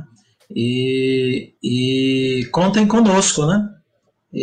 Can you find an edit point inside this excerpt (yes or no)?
yes